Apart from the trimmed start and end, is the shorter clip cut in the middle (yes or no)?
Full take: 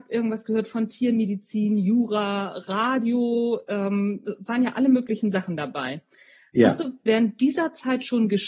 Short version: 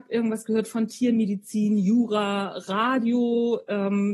no